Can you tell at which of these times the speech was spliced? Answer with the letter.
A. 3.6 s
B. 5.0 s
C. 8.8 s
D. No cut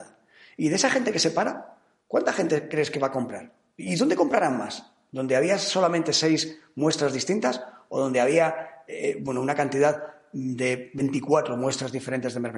D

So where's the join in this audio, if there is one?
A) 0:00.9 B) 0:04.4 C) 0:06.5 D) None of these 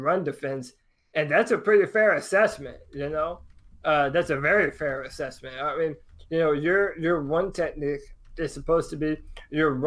D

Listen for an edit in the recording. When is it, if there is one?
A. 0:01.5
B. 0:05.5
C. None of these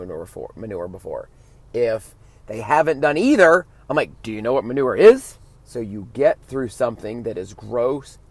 B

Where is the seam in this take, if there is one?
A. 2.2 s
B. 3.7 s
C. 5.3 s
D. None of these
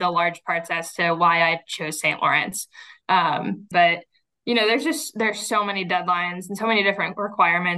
B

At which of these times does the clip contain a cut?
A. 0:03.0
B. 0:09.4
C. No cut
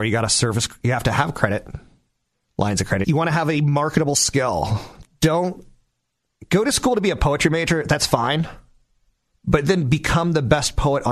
A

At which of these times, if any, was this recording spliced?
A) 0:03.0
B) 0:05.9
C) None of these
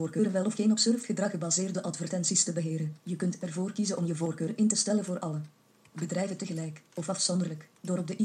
C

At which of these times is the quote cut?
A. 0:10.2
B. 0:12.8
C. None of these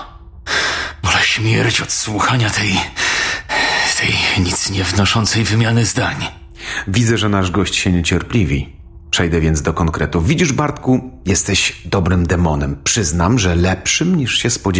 C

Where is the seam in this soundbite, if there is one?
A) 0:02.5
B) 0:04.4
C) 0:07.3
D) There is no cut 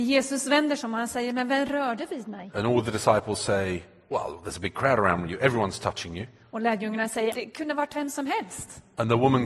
C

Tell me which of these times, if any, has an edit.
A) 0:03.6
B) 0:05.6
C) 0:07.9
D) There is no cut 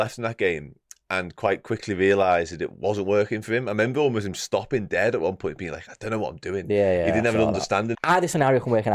C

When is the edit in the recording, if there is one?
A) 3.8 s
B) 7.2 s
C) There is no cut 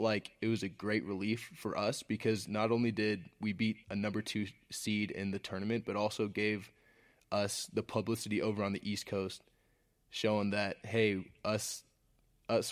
A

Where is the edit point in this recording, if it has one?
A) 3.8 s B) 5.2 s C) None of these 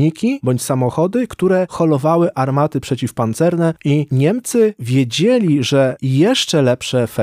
A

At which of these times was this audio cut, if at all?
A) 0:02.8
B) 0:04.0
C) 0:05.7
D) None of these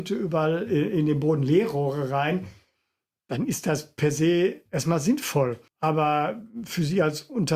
C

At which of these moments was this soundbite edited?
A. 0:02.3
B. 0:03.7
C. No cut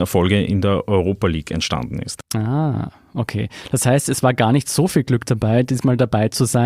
C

